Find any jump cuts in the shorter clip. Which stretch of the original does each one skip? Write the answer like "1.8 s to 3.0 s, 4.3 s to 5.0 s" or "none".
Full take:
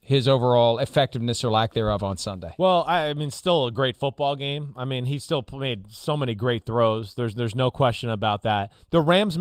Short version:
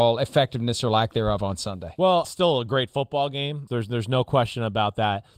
2.8 s to 3.3 s, 4.7 s to 7.1 s